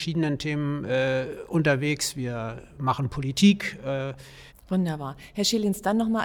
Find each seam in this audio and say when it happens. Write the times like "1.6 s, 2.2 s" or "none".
4.5 s